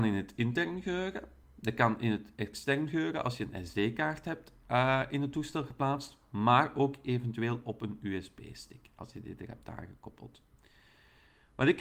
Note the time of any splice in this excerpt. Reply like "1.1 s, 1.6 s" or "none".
none